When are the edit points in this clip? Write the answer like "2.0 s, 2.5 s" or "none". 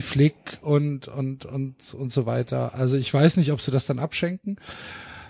none